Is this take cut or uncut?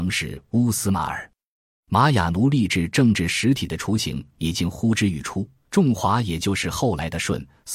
cut